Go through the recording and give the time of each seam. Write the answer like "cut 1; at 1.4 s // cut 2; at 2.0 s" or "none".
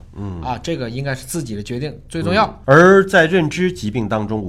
none